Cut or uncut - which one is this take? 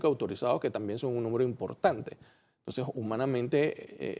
uncut